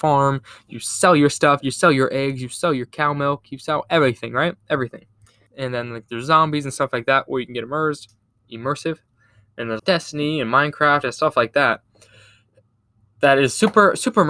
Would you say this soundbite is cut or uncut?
cut